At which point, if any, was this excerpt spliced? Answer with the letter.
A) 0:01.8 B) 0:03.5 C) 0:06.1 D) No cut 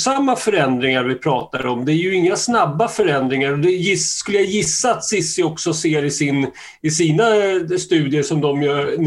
D